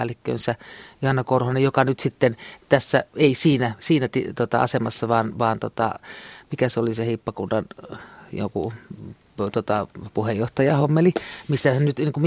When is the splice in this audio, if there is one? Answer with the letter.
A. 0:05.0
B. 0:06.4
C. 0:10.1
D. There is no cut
D